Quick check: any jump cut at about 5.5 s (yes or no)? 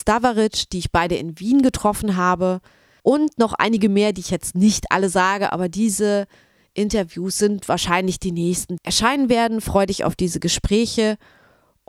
no